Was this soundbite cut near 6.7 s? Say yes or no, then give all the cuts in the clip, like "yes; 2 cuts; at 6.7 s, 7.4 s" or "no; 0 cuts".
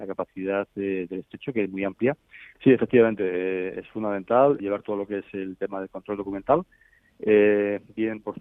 no; 2 cuts; at 2.5 s, 4.6 s